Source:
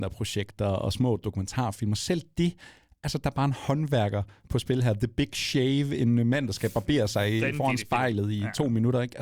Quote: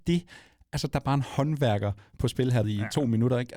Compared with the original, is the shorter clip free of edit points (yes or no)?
no